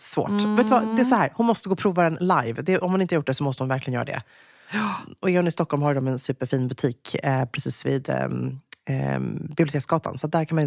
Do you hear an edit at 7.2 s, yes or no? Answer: no